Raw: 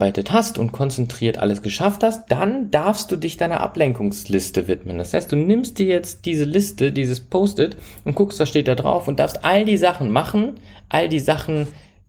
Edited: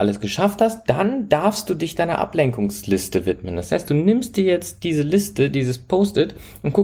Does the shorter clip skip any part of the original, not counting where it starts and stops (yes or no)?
no